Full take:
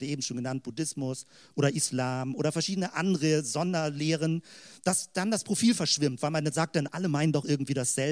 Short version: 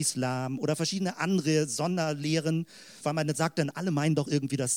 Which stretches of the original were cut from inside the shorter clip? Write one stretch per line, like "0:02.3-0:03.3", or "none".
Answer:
0:04.8-0:06.2